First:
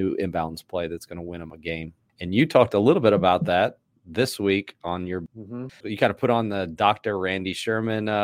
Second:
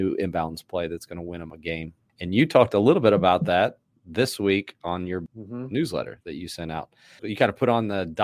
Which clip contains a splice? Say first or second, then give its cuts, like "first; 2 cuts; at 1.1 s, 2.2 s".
first; 1 cut; at 5.7 s